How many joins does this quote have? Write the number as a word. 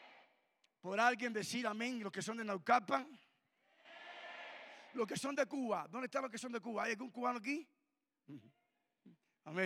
zero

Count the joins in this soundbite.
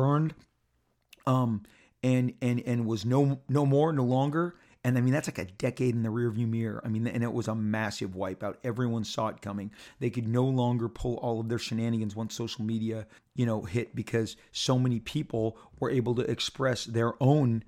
one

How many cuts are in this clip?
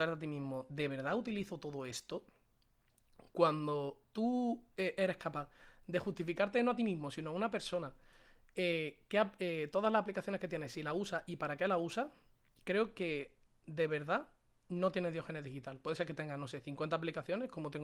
zero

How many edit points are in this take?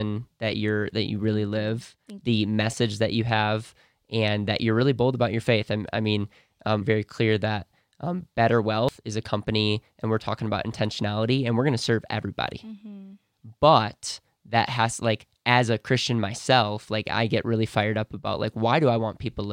one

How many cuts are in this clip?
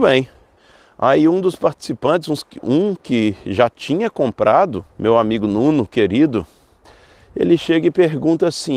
one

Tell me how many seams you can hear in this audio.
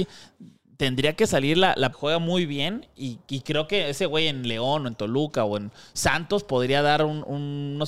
one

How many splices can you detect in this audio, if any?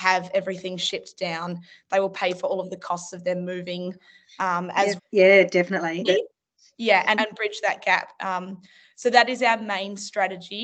three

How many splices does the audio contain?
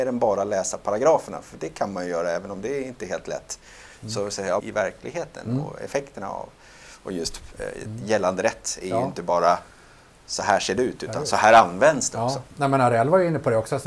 one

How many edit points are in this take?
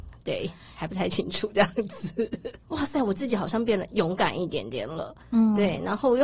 one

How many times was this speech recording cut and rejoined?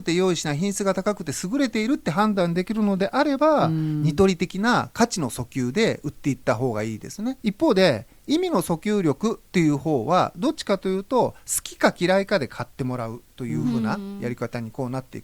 one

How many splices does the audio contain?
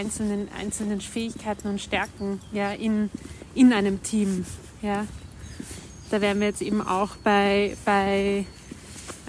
zero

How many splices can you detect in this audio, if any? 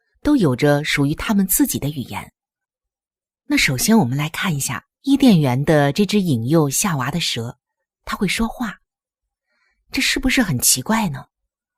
two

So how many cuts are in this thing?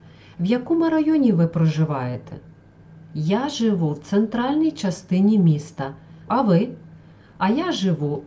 one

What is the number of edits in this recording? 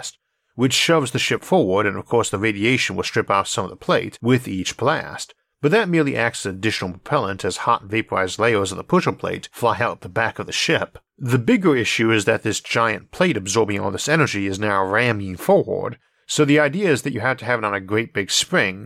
one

